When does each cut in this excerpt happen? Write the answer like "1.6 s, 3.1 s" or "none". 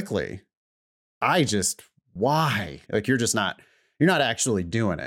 2.9 s